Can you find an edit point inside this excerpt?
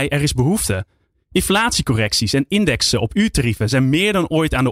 yes; 1 cut; at 1.1 s

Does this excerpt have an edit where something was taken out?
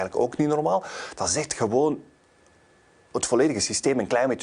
no; 0 cuts

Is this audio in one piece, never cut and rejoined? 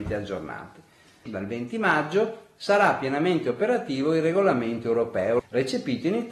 no; 2 cuts; at 1.3 s, 5.4 s

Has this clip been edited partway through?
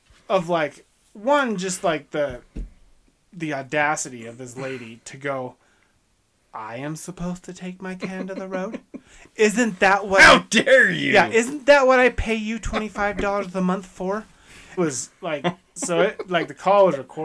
yes; 1 cut; at 14.8 s

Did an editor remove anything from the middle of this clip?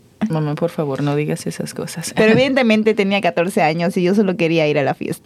no; 0 cuts

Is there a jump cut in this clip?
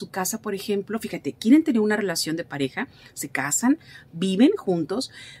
no; 0 cuts

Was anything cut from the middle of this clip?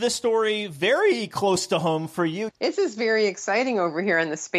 yes; 1 cut; at 2.5 s

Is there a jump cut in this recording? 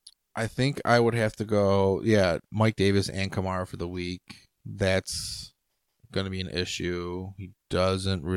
yes; 1 cut; at 2.4 s

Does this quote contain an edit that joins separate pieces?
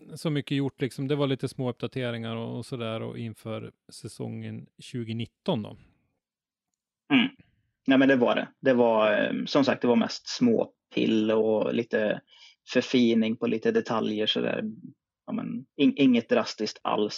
yes; 1 cut; at 15.7 s

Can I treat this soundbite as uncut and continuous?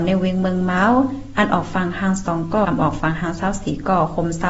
no; 1 cut; at 2.6 s

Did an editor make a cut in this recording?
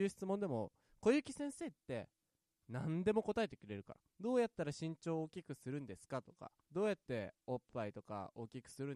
yes; 2 cuts; at 4.1 s, 6.6 s

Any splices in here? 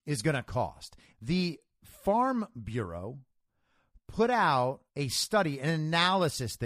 yes; 2 cuts; at 1.1 s, 4.9 s

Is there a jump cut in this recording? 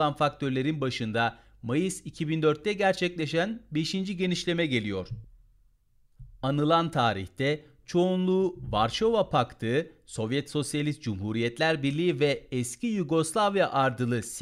no; 0 cuts

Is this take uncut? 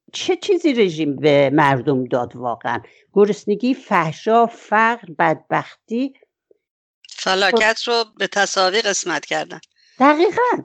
yes; 0 cuts

